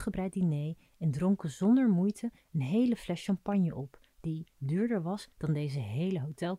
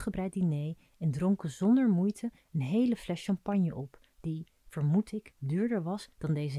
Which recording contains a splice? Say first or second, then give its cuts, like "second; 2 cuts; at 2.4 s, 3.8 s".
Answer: first; 1 cut; at 4.5 s